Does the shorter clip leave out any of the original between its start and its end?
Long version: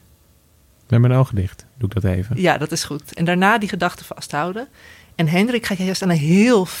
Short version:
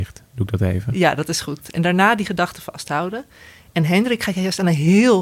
no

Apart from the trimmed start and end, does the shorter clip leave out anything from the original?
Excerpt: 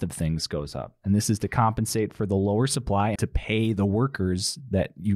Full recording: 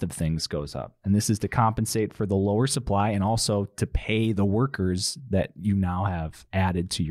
yes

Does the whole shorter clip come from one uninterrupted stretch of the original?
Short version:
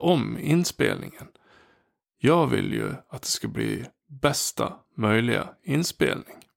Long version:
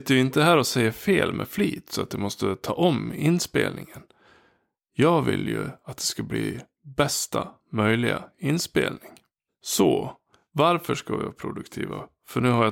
yes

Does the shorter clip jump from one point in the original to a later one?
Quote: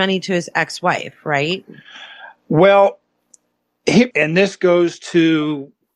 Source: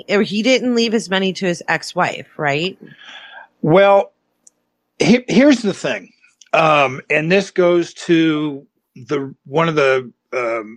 yes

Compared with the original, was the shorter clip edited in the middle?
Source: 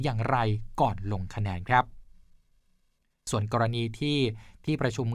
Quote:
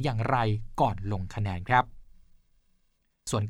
no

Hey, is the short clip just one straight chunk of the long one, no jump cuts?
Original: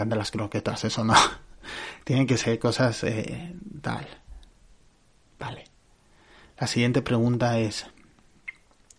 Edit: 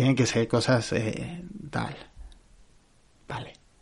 yes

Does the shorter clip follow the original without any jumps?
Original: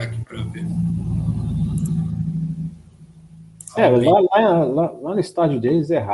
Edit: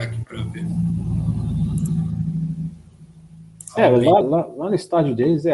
no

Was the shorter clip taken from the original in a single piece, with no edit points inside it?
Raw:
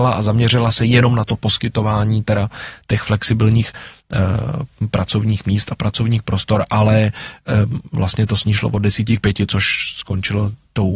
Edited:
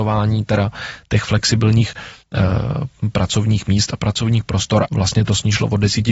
no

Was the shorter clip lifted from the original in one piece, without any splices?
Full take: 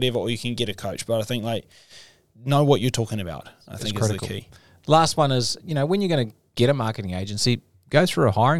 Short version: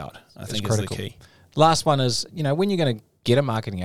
yes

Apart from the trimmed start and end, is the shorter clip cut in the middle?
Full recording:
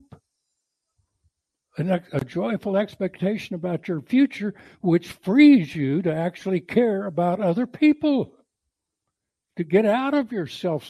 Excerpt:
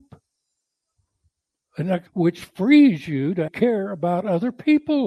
yes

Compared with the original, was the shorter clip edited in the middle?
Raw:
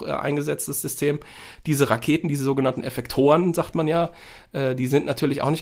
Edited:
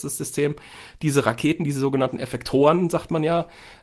no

